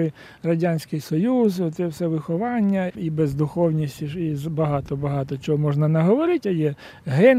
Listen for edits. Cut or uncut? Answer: cut